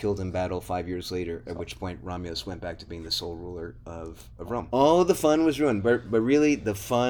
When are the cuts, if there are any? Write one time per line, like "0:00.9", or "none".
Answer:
0:04.7

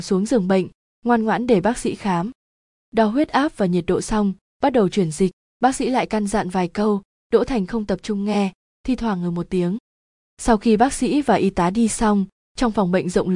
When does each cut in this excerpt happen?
none

